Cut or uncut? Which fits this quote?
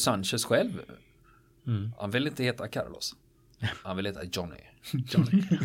uncut